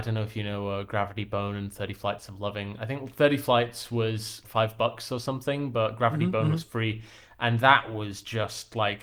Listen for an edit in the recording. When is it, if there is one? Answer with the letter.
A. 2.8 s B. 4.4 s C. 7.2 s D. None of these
B